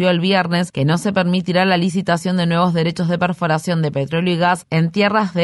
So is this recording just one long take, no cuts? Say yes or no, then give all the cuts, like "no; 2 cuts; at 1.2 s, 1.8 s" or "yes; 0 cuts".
yes; 0 cuts